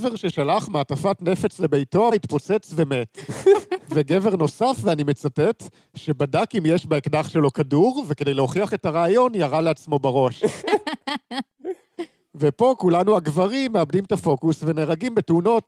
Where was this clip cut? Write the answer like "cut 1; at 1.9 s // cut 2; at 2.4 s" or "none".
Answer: cut 1; at 2.1 s // cut 2; at 10.6 s